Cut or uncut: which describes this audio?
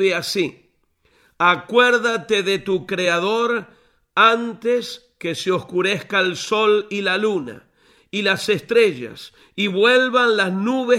uncut